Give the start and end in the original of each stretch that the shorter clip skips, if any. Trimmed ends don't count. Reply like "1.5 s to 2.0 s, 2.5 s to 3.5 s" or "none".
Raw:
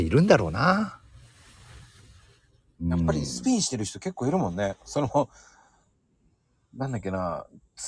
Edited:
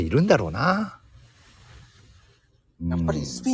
none